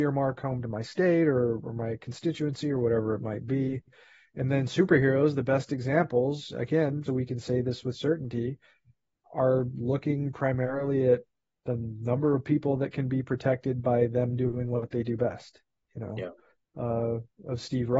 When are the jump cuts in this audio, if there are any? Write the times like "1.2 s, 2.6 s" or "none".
7.0 s, 16.6 s